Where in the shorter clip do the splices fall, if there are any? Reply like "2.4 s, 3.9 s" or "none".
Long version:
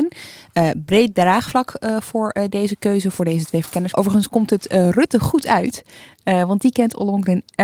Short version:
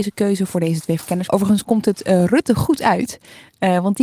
none